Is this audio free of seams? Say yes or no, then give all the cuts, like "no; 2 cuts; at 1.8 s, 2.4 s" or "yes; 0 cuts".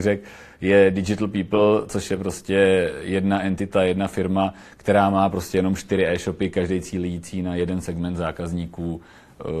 yes; 0 cuts